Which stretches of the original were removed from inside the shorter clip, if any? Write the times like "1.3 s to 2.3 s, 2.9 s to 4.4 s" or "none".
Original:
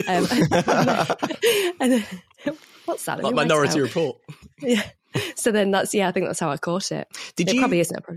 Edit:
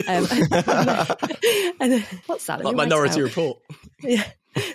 2.2 s to 2.8 s